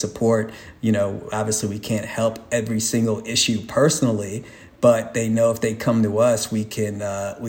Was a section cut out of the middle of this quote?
no; 0 cuts

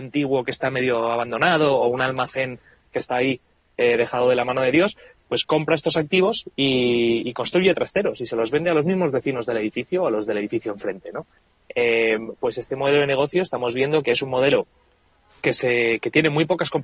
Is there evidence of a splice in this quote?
no; 0 cuts

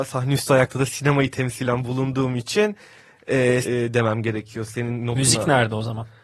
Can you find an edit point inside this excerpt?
yes; 1 cut; at 3.6 s

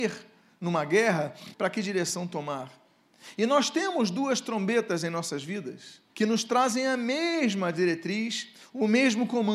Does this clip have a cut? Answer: yes; 2 cuts; at 1.5 s, 6.1 s

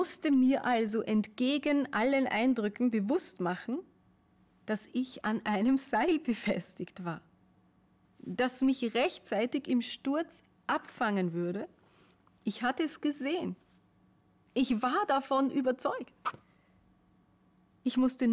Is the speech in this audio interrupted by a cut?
no; 0 cuts

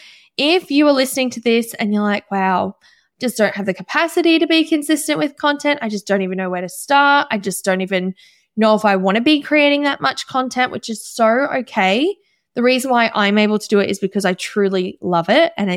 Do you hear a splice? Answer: no; 0 cuts

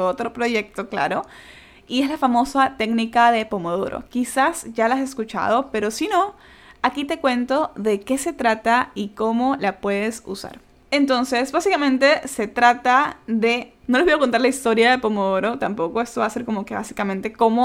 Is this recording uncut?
yes; 0 cuts

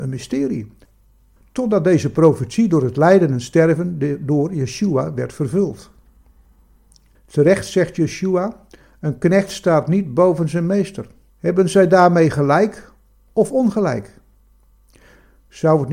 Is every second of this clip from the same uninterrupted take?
no; 2 cuts; at 7.1 s, 11.3 s

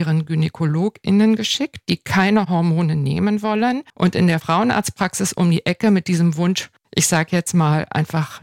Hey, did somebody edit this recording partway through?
yes; 1 cut; at 3.9 s

